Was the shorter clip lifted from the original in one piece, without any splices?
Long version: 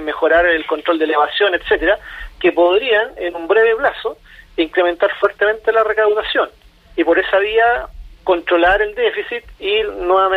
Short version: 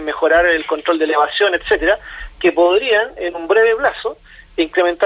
yes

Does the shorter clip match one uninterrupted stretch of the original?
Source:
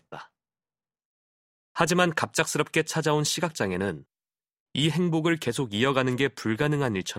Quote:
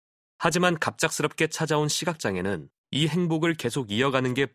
no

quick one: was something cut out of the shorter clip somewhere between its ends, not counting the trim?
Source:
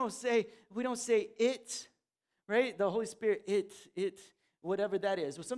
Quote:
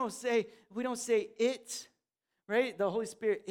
no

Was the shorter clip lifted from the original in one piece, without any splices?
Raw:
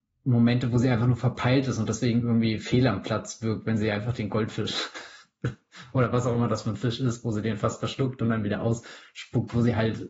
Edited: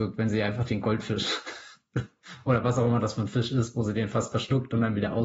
yes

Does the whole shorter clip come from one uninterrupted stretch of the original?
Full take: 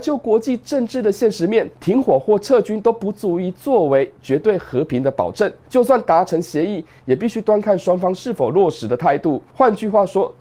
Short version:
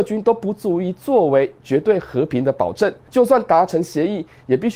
yes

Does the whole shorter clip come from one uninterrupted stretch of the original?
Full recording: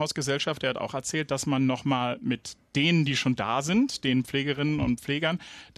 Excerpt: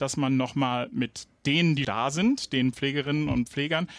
no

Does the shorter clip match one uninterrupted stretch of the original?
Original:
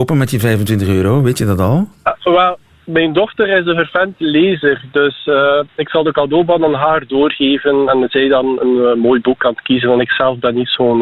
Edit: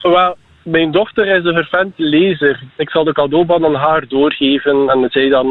no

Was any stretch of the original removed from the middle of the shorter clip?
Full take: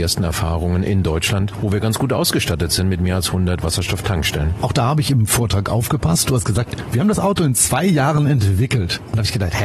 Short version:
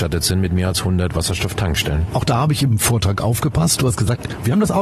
no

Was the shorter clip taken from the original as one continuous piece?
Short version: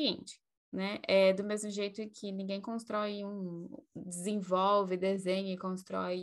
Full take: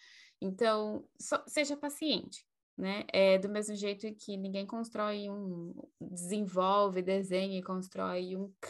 yes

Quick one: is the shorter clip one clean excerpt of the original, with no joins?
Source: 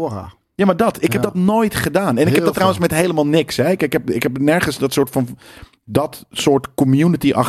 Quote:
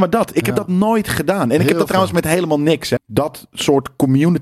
no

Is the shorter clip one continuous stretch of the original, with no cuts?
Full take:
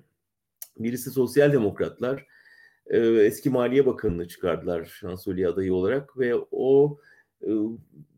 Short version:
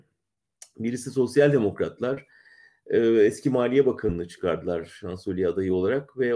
yes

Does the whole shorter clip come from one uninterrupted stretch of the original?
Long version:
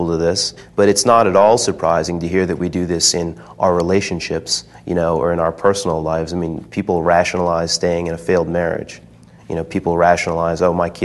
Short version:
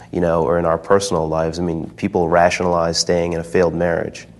yes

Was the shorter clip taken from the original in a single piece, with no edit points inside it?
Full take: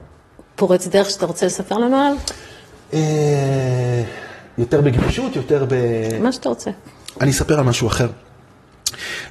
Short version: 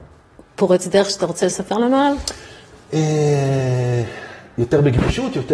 yes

